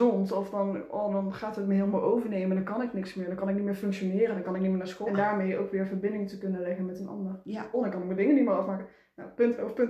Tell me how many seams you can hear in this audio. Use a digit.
2